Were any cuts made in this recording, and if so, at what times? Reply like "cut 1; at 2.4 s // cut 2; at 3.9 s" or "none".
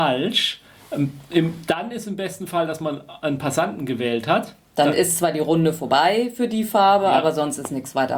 none